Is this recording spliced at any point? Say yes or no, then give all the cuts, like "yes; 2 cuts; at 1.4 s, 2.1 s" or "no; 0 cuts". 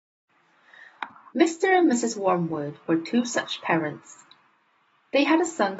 yes; 1 cut; at 1.3 s